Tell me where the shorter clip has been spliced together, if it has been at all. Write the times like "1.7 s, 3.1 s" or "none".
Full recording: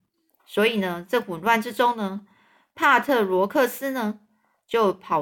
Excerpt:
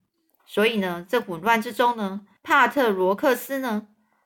2.4 s